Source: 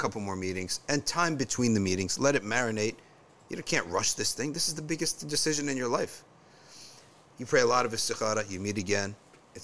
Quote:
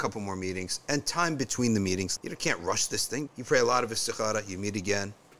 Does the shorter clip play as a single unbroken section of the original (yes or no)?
no